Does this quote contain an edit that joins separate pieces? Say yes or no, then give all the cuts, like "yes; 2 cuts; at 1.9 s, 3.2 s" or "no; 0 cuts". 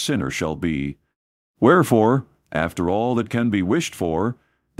yes; 1 cut; at 1.5 s